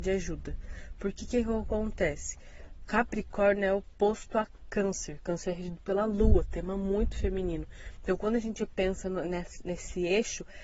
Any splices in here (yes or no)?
no